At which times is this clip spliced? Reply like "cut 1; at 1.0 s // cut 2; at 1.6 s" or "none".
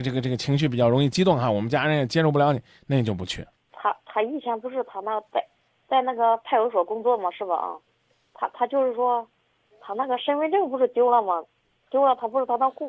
none